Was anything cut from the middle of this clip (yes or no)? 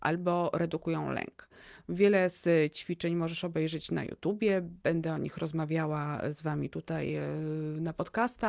no